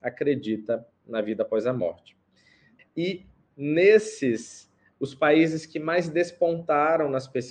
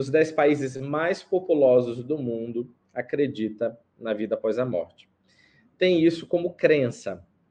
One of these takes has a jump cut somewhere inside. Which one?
first; 2 cuts; at 2.8 s, 4.9 s

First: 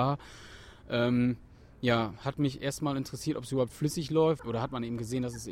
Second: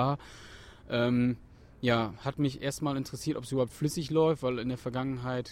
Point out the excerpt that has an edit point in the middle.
first; 1 cut; at 4.4 s

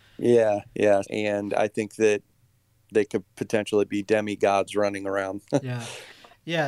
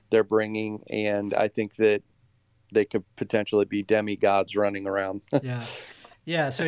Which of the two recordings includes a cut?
first; 1 cut; at 1.0 s

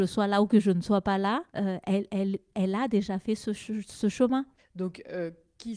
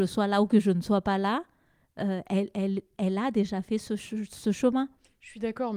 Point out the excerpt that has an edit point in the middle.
first; 2 cuts; at 1.5 s, 4.6 s

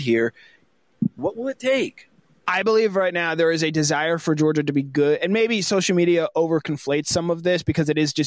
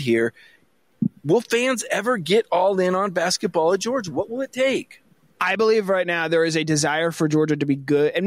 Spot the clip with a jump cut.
first; 1 cut; at 1.2 s

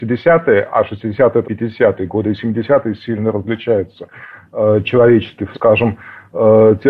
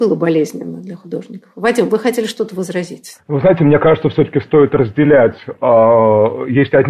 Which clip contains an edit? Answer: first; 2 cuts; at 1.4 s, 5.5 s

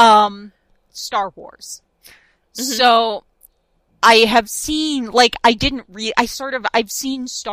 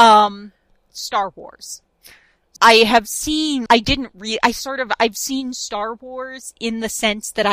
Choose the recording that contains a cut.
second; 2 cuts; at 2.6 s, 3.7 s

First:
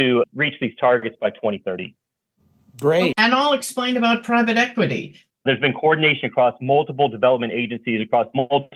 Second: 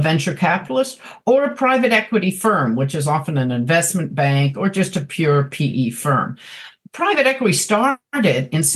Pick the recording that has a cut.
first; 2 cuts; at 3.1 s, 5.3 s

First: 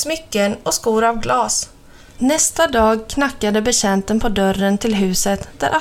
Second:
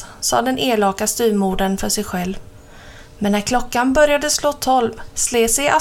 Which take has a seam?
first; 1 cut; at 2.2 s

